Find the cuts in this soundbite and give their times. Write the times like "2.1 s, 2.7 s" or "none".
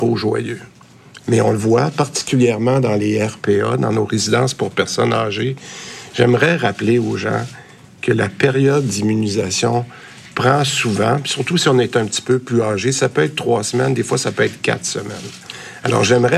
1.2 s